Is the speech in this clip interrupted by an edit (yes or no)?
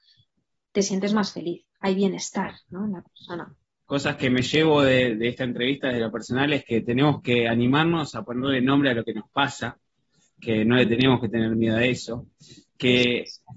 yes